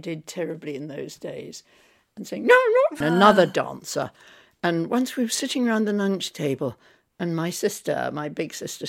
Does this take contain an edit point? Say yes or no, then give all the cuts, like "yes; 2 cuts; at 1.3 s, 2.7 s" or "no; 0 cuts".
yes; 1 cut; at 3.0 s